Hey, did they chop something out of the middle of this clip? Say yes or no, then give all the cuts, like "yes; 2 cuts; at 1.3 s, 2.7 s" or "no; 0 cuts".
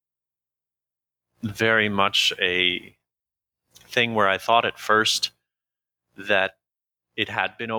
no; 0 cuts